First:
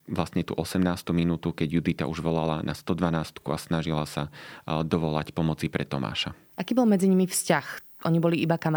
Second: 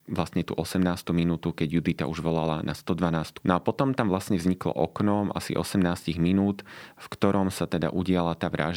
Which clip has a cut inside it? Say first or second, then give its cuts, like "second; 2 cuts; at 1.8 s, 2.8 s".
second; 1 cut; at 3.4 s